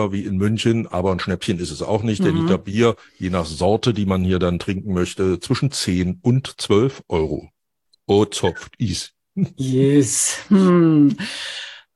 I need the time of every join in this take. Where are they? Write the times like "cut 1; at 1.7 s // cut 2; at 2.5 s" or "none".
none